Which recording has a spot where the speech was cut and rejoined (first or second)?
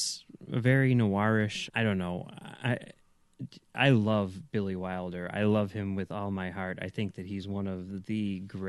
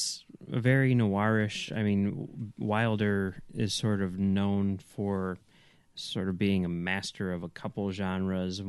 first